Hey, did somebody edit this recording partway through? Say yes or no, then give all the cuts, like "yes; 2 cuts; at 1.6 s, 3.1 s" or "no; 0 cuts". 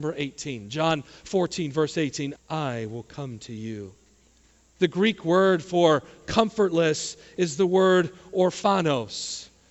yes; 1 cut; at 2.4 s